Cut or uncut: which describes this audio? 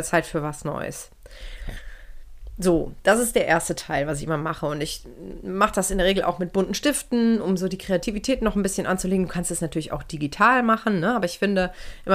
uncut